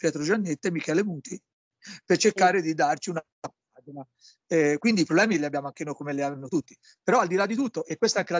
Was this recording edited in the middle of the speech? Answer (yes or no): no